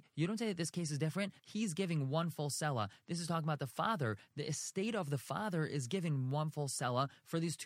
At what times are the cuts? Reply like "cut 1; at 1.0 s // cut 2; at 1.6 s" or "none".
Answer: cut 1; at 1.4 s